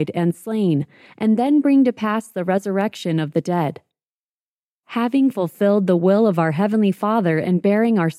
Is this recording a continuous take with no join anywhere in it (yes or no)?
yes